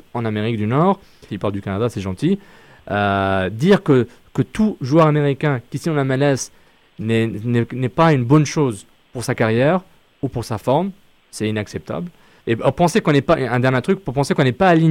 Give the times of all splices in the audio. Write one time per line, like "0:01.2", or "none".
0:01.3
0:12.4

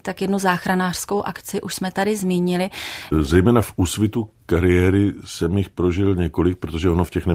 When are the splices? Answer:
0:03.1

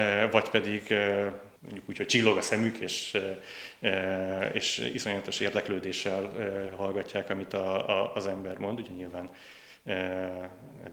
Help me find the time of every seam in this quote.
0:01.6

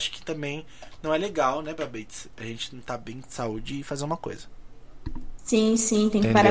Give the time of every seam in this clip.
none

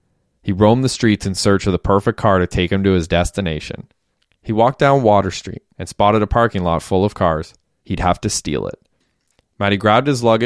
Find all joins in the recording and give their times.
0:05.7
0:07.8

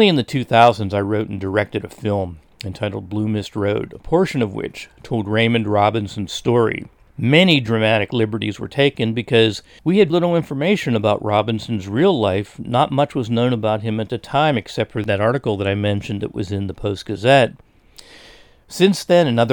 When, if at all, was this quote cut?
0:10.1

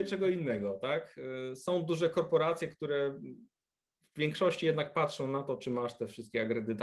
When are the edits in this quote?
none

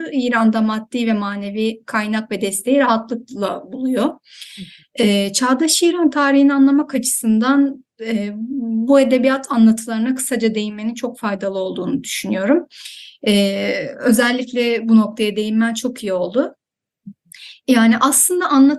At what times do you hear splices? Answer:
none

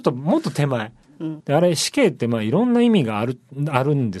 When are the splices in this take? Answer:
0:01.4

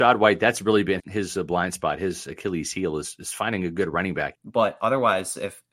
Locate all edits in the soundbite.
0:01.0
0:04.3

